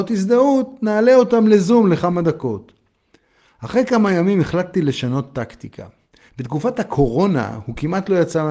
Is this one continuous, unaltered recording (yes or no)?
no